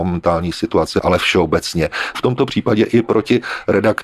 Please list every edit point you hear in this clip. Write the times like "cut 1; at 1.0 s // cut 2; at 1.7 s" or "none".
cut 1; at 2.1 s